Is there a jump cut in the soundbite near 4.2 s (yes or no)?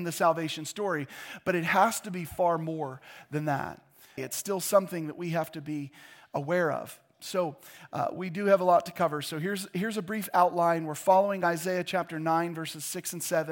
yes